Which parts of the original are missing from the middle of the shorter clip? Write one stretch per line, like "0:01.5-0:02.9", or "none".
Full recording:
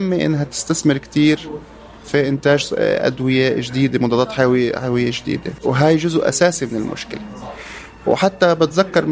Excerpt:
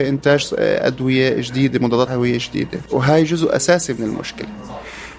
0:04.3-0:04.8